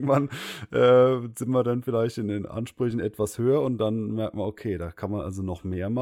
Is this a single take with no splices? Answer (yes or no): yes